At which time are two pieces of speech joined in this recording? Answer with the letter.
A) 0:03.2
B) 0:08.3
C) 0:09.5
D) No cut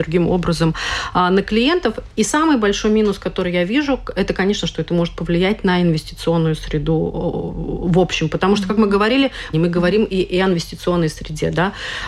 C